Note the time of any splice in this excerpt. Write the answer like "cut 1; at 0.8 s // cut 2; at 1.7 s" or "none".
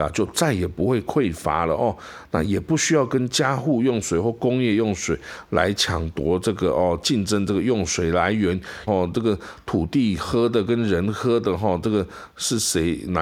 cut 1; at 8.9 s